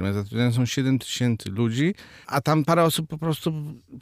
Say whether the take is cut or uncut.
cut